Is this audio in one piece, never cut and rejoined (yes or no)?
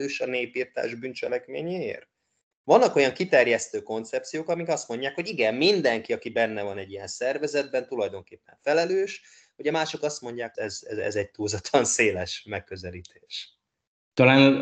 no